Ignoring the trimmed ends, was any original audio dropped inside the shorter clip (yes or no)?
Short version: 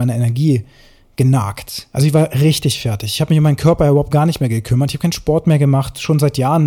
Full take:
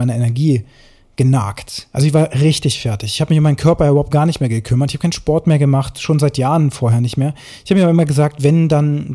no